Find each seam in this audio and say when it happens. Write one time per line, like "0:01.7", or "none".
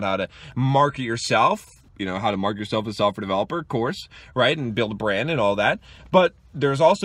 0:01.9